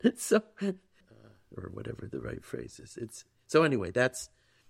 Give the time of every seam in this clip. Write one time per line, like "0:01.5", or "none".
0:01.0